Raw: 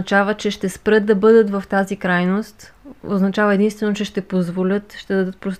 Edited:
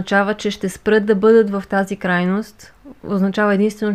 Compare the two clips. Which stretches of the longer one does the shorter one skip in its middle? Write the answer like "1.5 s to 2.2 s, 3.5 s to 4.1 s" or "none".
none